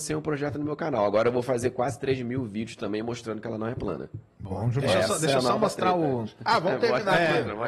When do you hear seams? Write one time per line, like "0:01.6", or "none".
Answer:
0:04.3